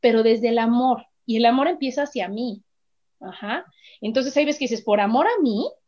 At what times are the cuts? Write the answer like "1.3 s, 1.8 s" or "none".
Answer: none

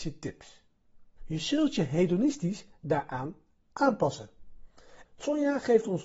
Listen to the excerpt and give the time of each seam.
1.2 s, 5.0 s

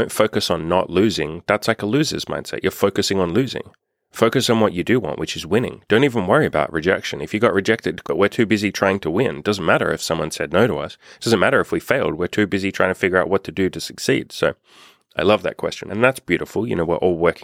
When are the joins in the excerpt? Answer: 8.0 s, 15.9 s

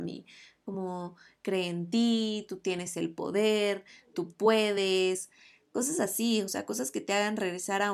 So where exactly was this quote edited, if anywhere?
none

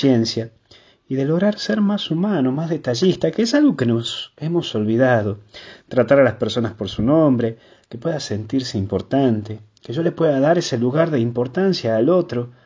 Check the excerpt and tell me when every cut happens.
none

